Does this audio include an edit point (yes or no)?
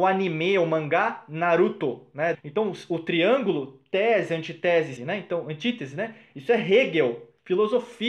yes